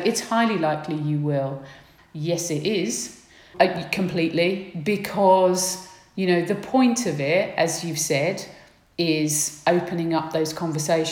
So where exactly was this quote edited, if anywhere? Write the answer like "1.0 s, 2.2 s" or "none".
2.0 s, 3.5 s

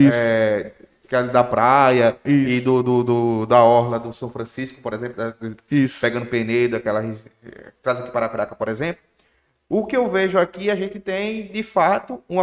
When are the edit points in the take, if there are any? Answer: none

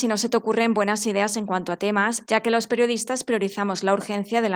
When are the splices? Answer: 2.2 s

